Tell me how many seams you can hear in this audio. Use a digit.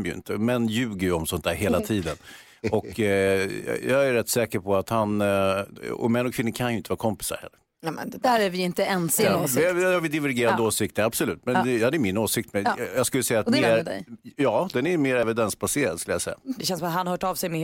3